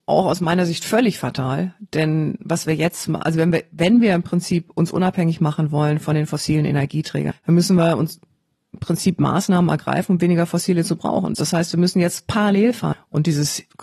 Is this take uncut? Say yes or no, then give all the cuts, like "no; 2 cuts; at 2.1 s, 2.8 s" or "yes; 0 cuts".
no; 3 cuts; at 7.3 s, 11.3 s, 12.9 s